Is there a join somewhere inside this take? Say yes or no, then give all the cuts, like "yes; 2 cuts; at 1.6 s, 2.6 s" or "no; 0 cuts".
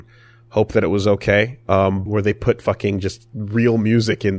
yes; 1 cut; at 2.1 s